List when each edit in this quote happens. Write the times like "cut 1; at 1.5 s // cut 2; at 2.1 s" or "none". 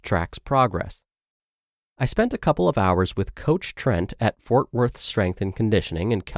none

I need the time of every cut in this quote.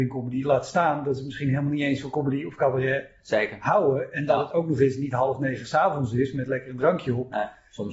none

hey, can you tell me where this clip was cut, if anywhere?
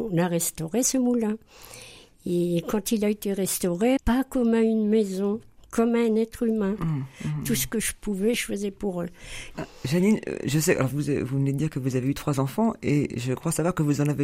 cut 1; at 4.0 s // cut 2; at 6.8 s // cut 3; at 9.5 s

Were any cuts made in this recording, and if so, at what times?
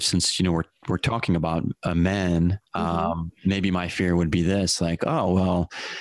none

